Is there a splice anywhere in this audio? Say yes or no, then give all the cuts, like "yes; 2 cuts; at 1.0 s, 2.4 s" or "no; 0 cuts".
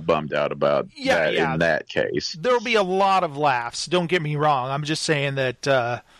no; 0 cuts